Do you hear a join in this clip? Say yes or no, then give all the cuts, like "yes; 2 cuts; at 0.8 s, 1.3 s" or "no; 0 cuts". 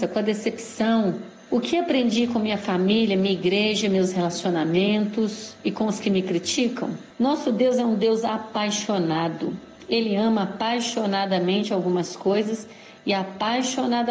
yes; 1 cut; at 7.1 s